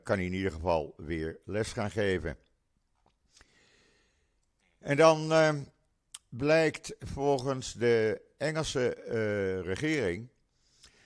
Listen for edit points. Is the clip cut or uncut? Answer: uncut